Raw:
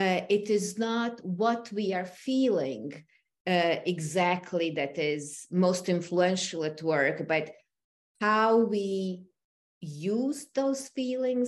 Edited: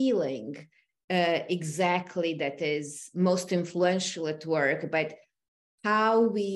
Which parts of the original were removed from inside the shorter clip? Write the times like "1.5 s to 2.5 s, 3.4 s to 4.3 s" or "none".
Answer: none